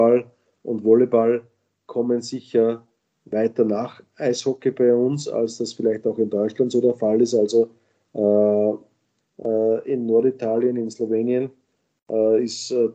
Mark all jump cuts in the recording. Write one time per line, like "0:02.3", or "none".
0:09.2